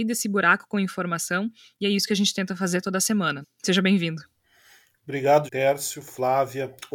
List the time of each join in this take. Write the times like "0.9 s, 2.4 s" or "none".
3.4 s, 5.5 s